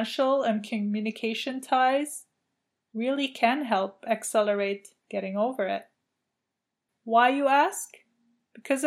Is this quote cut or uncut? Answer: uncut